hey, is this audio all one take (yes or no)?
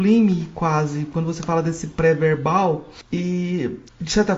yes